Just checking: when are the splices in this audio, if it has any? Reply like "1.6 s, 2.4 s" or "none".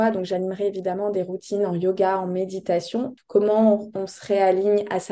3.2 s

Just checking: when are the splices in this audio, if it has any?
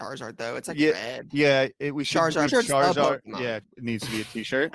2.5 s, 3.6 s

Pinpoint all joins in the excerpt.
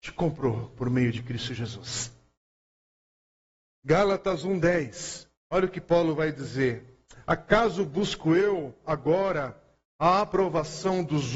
none

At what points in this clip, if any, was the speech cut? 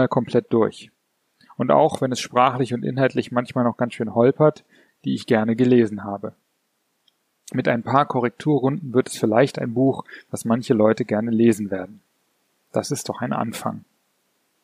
4.9 s

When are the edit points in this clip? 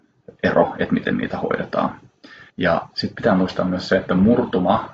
2.5 s

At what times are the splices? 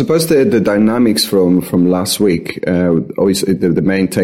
none

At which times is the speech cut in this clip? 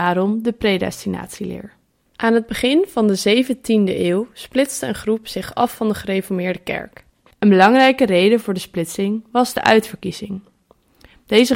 none

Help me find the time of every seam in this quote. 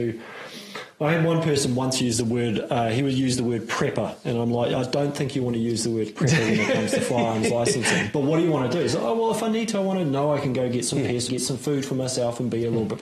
11.3 s

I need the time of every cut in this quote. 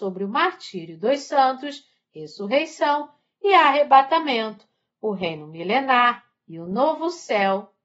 none

